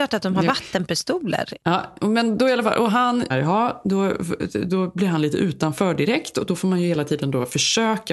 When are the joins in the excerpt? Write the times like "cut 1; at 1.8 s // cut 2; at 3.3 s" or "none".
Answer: cut 1; at 3.3 s